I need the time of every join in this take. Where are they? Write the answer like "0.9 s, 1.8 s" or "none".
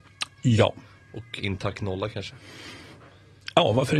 1.4 s